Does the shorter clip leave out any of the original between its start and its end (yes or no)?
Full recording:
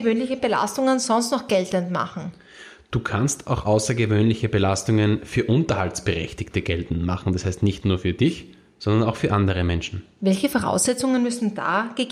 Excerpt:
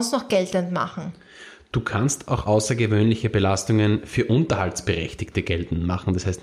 no